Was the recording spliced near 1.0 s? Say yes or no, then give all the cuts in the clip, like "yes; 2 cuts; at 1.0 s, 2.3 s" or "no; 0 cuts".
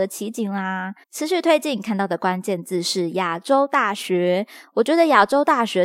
yes; 1 cut; at 1.0 s